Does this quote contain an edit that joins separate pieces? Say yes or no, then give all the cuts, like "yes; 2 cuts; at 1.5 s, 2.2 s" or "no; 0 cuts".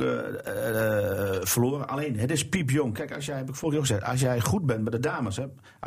no; 0 cuts